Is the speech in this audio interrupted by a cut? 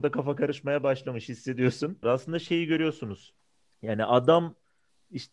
yes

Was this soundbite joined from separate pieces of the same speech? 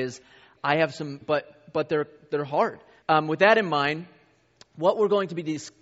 yes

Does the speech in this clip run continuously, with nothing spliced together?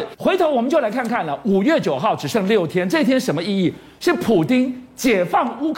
yes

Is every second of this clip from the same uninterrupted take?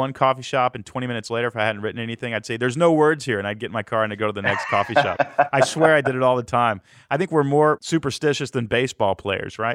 yes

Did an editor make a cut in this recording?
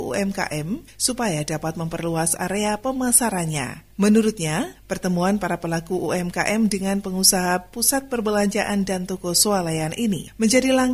no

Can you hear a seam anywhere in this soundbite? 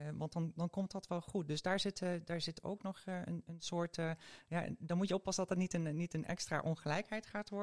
no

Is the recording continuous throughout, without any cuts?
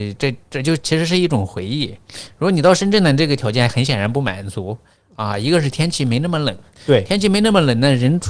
yes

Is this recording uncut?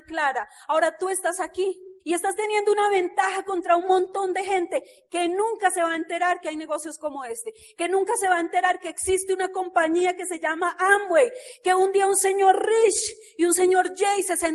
no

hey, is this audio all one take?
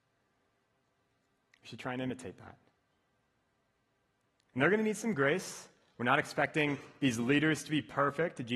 yes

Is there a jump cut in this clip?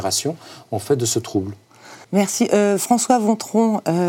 yes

